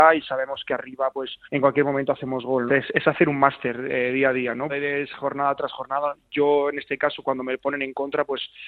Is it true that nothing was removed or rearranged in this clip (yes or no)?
no